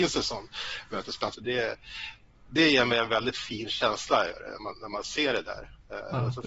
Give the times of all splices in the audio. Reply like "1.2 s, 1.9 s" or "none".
1.3 s

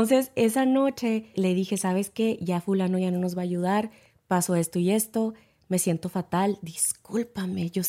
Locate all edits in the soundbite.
1.3 s

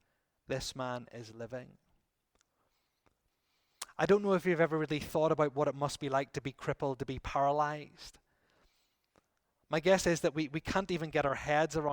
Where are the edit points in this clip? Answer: none

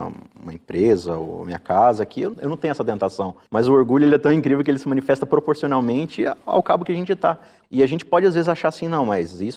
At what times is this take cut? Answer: 2.3 s, 7.6 s

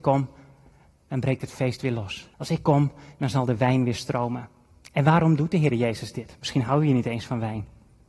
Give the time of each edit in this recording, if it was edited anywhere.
2.3 s

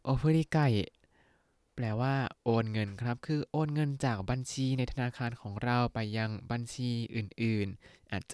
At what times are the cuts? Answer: none

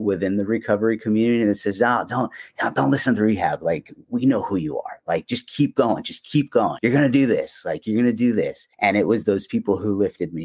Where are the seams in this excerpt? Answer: 6.8 s, 8.7 s

